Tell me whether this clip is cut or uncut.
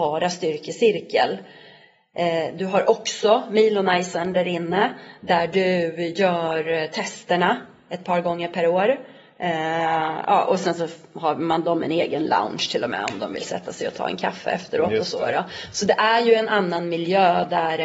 uncut